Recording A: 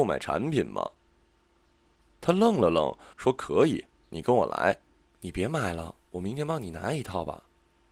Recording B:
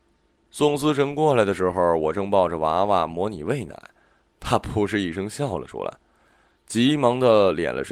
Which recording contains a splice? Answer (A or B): A